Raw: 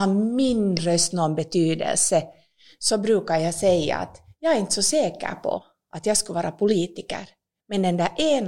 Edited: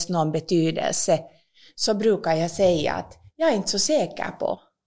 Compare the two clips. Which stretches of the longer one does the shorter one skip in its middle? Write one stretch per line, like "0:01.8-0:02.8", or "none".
none